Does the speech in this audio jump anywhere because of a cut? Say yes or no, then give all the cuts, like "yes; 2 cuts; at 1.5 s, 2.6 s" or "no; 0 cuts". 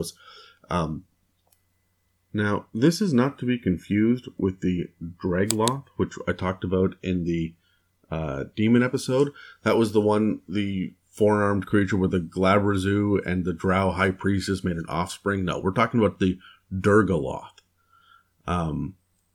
no; 0 cuts